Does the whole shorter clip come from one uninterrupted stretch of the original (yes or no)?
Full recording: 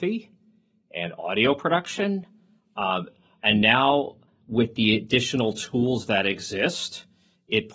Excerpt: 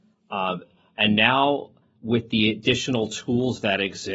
yes